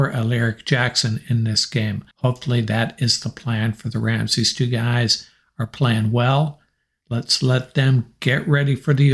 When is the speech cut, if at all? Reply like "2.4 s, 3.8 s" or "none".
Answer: 2.1 s, 7.0 s